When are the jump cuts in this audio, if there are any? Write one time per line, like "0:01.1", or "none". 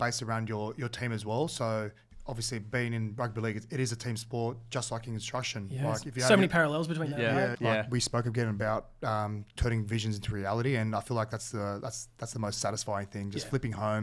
0:07.5

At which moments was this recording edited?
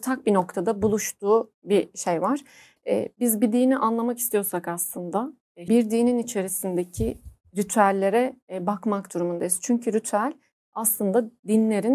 0:02.8
0:05.7

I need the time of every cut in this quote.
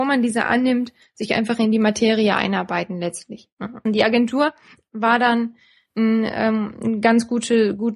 0:03.9

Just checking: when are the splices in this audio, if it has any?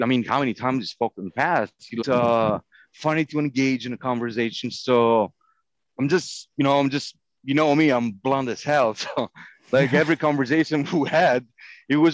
0:02.0

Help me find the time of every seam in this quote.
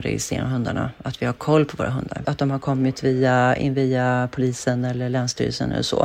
0:02.2

